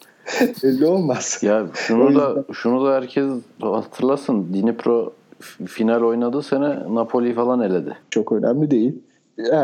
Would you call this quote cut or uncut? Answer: cut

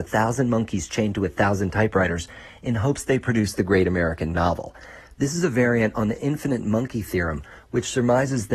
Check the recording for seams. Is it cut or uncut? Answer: uncut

